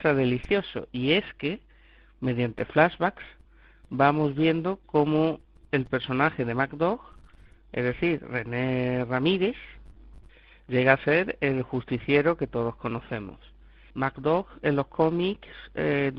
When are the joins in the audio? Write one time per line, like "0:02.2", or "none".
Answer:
0:13.9